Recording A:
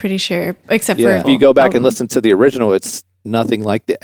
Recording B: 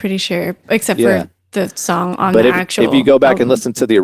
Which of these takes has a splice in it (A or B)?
A